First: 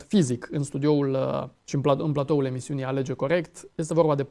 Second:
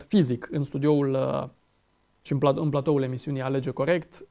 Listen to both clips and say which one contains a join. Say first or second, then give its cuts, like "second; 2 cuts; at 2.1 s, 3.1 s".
first; 1 cut; at 1.6 s